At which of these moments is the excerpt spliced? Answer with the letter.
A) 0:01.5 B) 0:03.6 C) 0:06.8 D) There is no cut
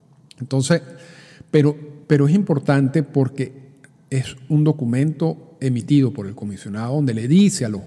D